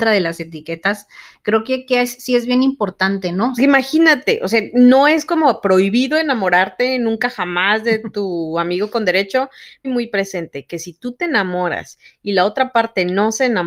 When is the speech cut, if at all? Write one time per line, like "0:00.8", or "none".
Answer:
0:03.6
0:09.8